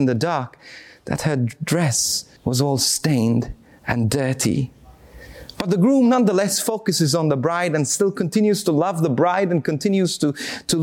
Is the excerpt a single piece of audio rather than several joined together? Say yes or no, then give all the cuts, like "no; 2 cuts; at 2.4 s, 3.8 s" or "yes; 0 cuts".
no; 1 cut; at 2.4 s